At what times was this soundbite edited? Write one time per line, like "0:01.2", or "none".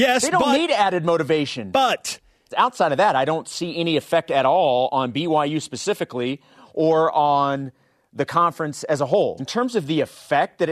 0:02.5
0:09.4